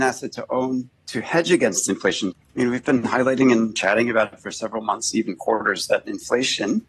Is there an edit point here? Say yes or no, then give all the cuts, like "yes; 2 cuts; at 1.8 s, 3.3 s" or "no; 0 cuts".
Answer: yes; 1 cut; at 2.3 s